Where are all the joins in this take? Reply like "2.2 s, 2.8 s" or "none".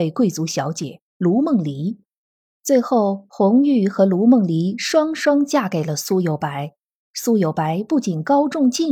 2.5 s